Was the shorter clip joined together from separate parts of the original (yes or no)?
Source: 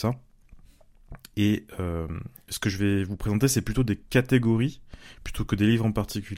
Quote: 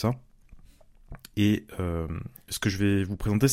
no